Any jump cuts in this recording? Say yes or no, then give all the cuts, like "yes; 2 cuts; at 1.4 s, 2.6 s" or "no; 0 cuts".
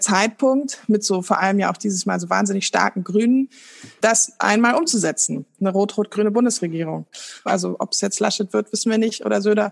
yes; 1 cut; at 7.5 s